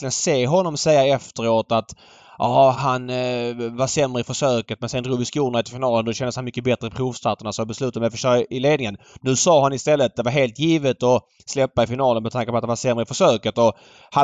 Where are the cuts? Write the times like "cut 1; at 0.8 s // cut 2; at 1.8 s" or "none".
cut 1; at 2.7 s

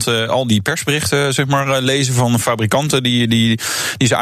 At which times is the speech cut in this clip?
none

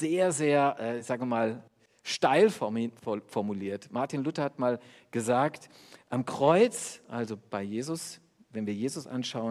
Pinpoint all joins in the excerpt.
none

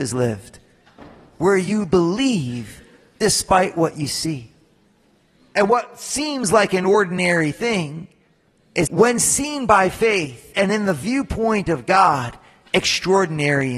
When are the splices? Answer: cut 1; at 8.9 s

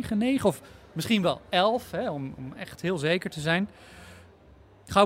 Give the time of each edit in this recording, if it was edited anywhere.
none

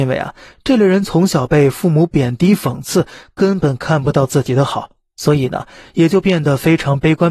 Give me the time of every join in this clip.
none

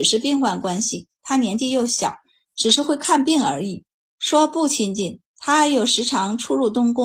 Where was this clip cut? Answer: none

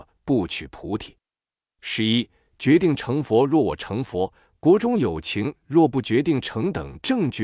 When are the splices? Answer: none

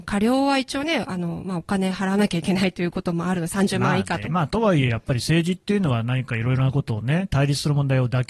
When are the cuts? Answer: cut 1; at 4.3 s

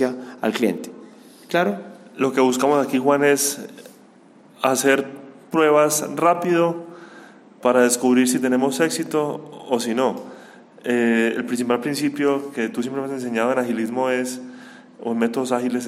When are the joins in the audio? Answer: none

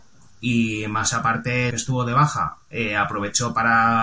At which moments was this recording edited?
cut 1; at 1.7 s

